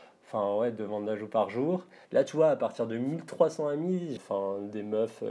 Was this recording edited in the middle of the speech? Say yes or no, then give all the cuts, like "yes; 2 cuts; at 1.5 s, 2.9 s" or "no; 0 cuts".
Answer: yes; 2 cuts; at 2.0 s, 4.2 s